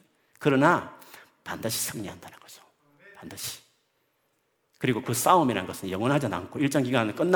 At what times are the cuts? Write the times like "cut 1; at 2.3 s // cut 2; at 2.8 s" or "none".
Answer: none